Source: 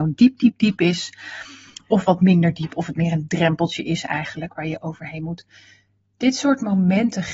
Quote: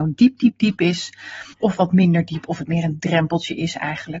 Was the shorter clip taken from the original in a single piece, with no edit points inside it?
no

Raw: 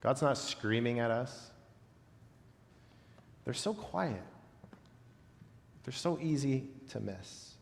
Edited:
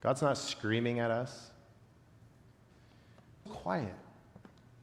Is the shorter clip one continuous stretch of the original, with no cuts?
no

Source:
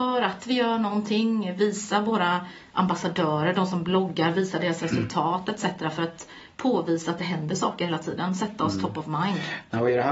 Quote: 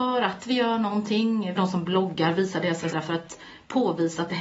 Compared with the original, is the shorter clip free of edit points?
no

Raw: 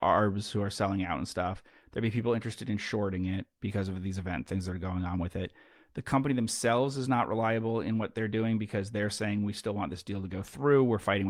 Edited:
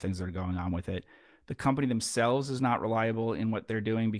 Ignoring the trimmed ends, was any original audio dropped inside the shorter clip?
no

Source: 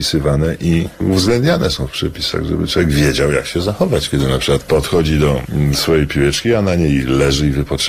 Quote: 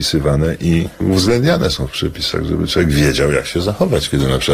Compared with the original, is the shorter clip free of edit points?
yes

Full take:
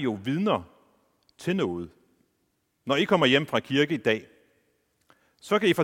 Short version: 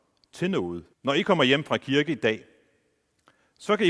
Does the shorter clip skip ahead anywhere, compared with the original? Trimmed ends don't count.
yes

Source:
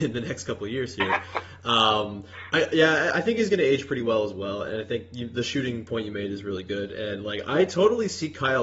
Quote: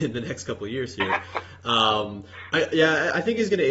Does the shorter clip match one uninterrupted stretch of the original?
yes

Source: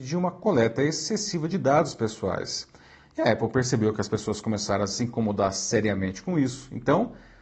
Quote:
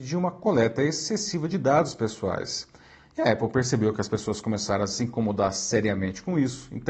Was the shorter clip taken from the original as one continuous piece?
yes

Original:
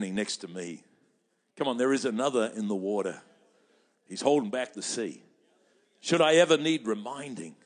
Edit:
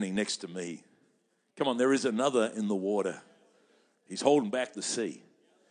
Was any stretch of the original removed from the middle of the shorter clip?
no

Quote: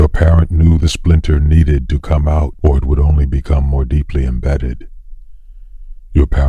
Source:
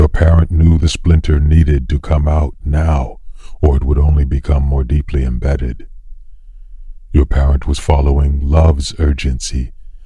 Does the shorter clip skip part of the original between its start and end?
yes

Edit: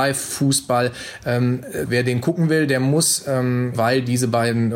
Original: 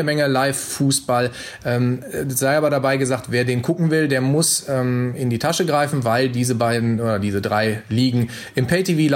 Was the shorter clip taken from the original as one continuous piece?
no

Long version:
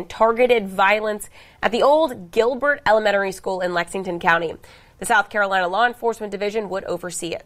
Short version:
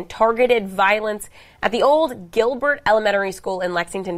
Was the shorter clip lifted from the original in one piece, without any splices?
yes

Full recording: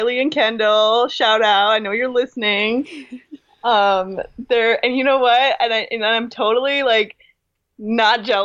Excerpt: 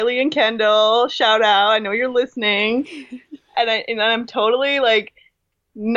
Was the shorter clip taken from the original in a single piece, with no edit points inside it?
no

